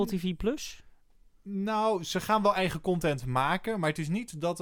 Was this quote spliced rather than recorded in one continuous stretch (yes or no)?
no